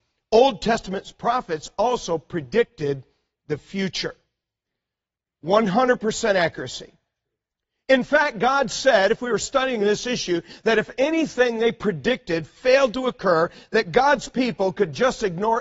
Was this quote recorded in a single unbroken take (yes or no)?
yes